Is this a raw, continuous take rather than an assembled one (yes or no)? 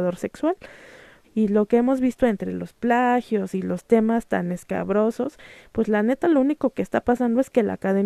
no